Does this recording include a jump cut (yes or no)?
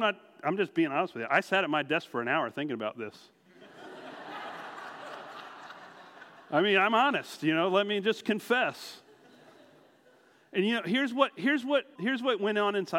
yes